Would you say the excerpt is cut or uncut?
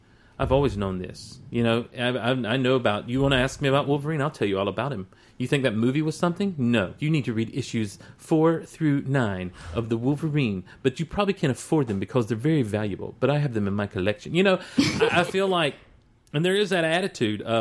cut